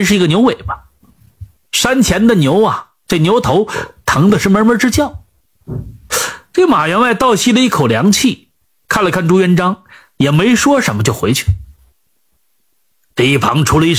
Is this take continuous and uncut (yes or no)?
yes